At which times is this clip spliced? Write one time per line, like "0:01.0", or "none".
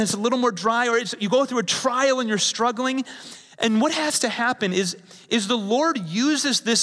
none